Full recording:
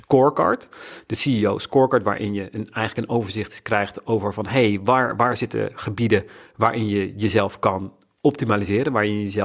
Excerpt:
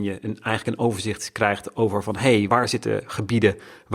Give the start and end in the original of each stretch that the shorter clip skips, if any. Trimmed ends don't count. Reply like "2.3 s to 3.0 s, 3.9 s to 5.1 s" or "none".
4.8 s to 5.2 s